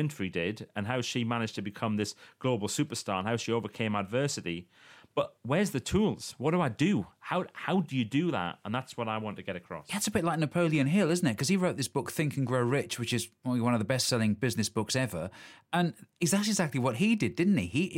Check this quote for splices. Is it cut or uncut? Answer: uncut